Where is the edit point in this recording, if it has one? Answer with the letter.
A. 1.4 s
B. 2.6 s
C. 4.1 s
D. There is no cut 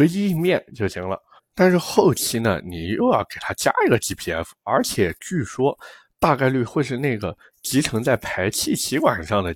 A